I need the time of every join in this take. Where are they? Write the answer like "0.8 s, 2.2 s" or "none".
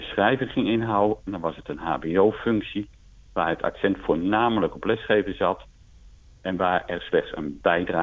1.3 s